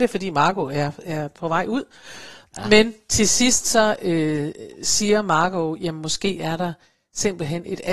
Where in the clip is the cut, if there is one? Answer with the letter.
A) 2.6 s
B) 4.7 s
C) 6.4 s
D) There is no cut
D